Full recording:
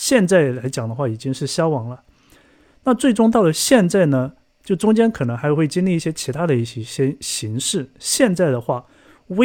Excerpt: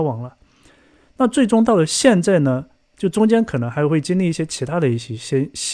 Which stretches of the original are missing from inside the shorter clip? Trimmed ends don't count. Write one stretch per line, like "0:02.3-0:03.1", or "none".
none